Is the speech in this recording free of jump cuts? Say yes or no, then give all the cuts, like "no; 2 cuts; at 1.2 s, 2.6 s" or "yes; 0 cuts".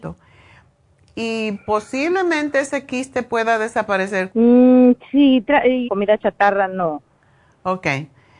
no; 2 cuts; at 4.3 s, 5.8 s